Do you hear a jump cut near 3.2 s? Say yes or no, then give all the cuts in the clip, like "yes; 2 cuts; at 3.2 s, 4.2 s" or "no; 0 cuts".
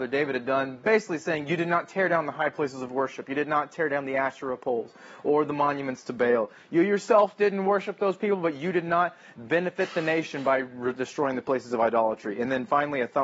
no; 0 cuts